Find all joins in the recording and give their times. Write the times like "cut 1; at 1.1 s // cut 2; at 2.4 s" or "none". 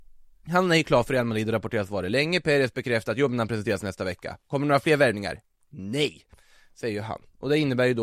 none